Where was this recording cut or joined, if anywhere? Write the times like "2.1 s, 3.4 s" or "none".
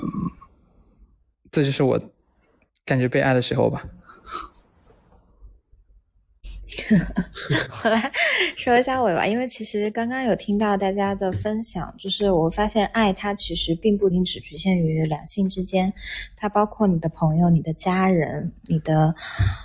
14.1 s

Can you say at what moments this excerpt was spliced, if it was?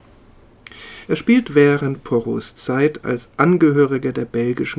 1.1 s

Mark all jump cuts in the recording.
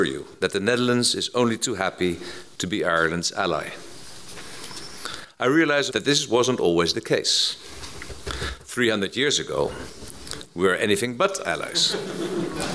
5.9 s

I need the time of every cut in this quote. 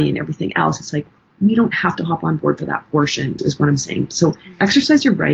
3.4 s

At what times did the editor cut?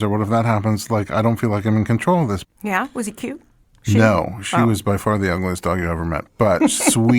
2.4 s

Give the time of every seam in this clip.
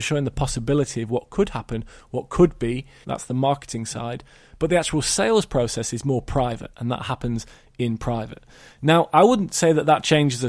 3.0 s

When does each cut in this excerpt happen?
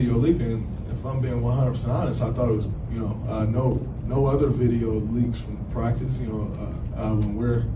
none

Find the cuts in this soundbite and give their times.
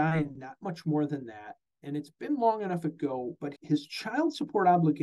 3.6 s

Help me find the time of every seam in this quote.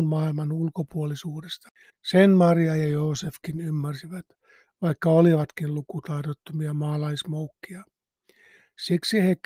1.9 s

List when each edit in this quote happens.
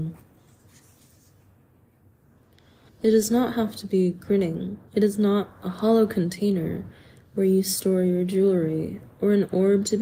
2.9 s, 4.9 s

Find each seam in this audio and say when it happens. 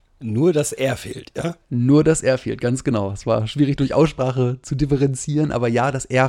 3.8 s

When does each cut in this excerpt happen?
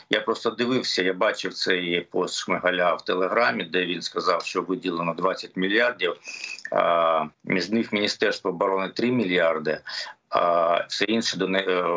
7.3 s

